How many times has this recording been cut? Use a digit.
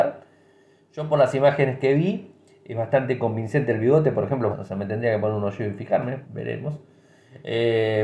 2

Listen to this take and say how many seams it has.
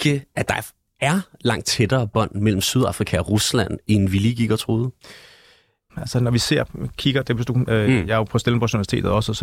2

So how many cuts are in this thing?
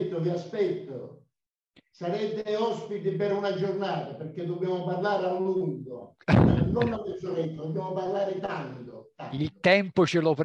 0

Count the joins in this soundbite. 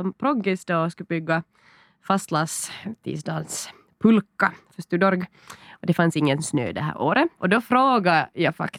1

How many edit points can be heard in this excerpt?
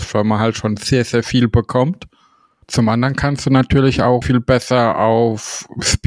2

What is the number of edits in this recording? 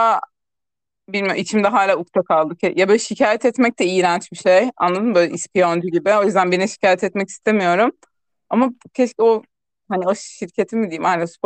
0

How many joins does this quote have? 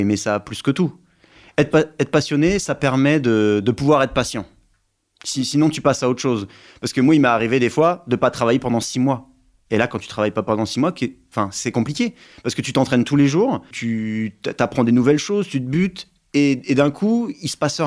1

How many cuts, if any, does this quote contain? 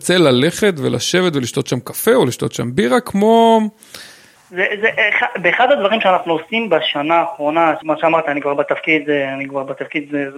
2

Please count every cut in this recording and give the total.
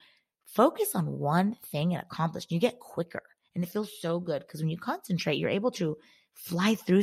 0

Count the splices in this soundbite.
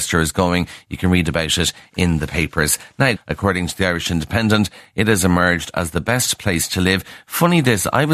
1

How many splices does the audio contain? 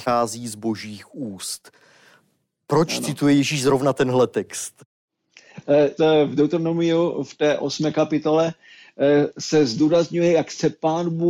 1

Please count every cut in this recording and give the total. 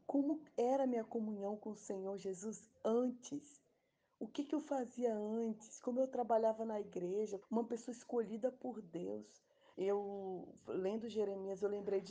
2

